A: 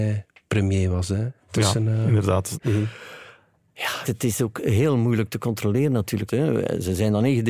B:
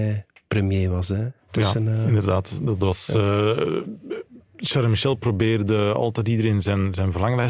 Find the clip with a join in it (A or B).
A